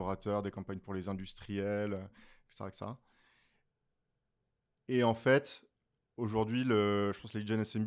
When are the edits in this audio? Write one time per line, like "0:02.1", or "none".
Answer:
none

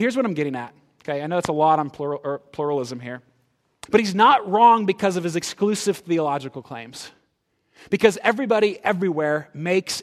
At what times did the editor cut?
0:03.9

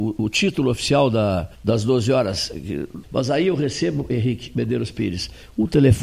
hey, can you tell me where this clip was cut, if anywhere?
0:01.5
0:03.0

